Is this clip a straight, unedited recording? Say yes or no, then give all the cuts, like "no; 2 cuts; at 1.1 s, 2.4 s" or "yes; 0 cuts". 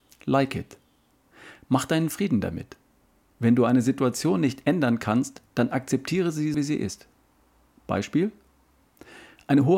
no; 1 cut; at 6.5 s